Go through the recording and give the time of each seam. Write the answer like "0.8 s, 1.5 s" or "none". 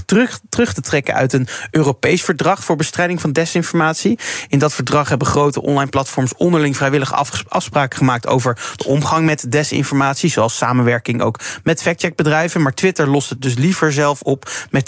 none